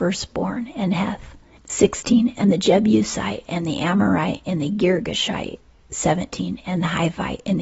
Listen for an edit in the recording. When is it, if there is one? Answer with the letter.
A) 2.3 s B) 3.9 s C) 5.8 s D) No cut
D